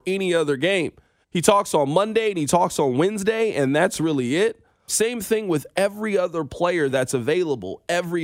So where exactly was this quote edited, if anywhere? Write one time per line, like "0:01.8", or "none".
0:01.2
0:04.9